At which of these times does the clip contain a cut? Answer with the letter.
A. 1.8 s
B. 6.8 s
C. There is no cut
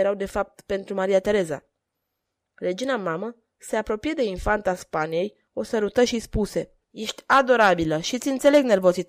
B